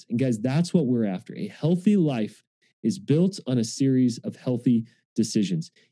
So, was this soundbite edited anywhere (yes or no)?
no